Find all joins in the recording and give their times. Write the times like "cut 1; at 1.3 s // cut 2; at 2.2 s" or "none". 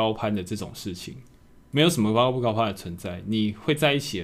cut 1; at 1.6 s